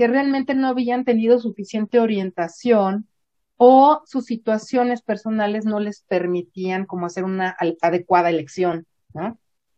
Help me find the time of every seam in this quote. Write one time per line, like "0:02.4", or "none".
none